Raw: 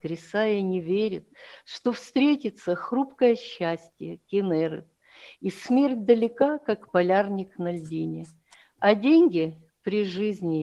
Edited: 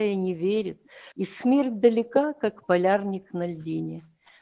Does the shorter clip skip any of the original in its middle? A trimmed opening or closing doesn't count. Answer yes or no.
yes